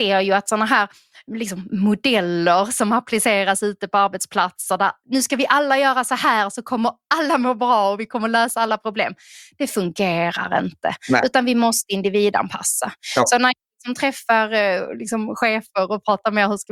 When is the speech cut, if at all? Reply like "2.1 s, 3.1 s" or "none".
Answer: none